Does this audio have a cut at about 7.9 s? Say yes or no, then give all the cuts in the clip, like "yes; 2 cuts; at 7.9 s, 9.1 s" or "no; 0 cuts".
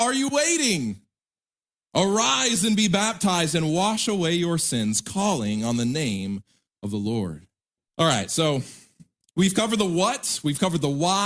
yes; 1 cut; at 7.9 s